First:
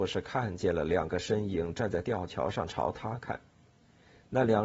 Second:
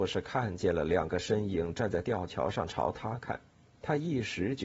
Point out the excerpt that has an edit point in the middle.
second; 1 cut; at 3.7 s

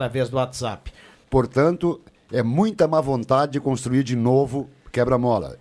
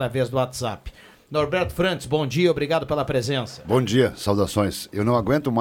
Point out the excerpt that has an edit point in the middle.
first; 1 cut; at 1.2 s

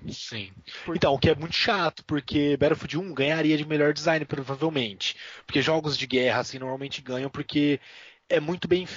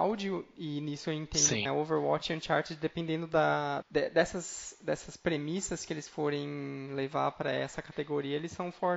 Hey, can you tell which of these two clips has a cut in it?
second; 2 cuts; at 1.7 s, 3.8 s

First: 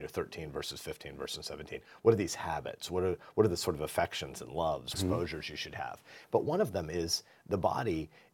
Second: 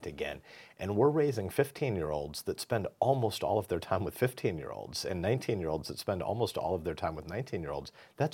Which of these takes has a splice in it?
first; 2 cuts; at 4.9 s, 6.2 s

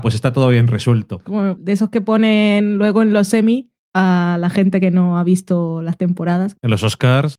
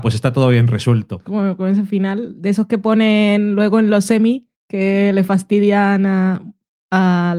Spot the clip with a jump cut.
first; 2 cuts; at 1.6 s, 3.8 s

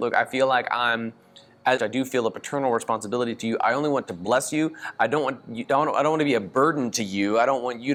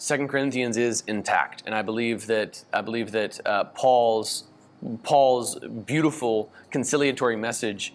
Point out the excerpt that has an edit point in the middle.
first; 1 cut; at 1.8 s

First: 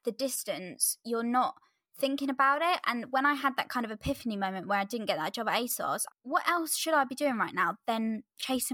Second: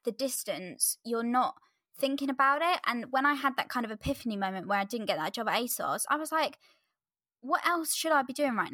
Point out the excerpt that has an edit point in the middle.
first; 1 cut; at 6.1 s

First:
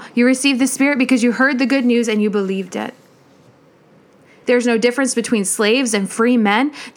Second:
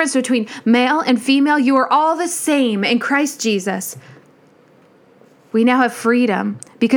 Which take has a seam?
first; 1 cut; at 4.4 s

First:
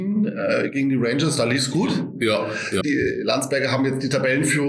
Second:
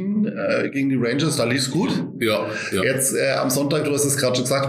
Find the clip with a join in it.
first; 1 cut; at 2.8 s

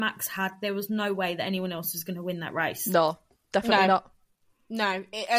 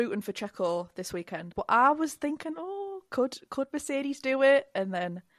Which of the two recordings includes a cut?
second; 1 cut; at 1.5 s

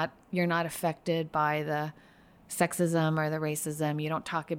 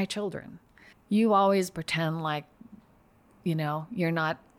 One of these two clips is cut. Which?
second; 1 cut; at 0.9 s

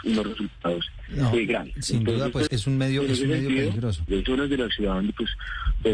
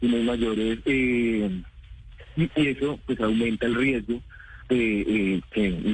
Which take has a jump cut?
first; 2 cuts; at 2.5 s, 4.1 s

